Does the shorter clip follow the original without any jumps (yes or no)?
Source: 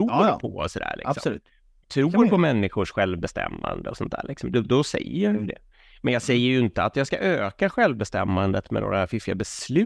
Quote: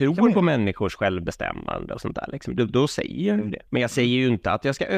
no